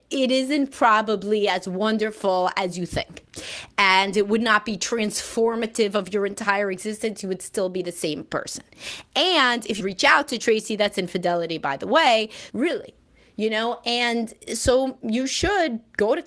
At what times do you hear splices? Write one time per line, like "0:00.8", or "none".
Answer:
0:09.8
0:12.5